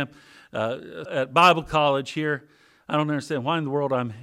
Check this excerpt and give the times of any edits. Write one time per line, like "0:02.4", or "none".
0:01.0